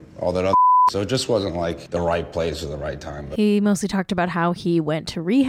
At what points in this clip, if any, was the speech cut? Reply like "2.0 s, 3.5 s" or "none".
none